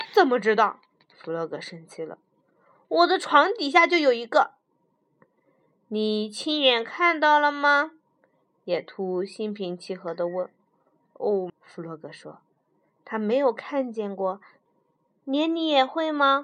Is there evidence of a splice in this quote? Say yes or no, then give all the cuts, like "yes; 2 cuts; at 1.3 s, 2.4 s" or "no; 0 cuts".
yes; 2 cuts; at 11.5 s, 14.7 s